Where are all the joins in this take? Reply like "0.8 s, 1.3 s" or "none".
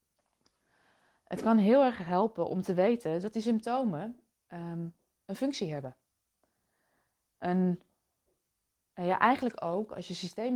none